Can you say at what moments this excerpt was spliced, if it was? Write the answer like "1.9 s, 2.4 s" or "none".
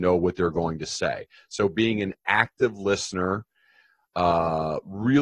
none